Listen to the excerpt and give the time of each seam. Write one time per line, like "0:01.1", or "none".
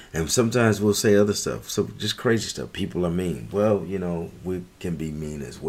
none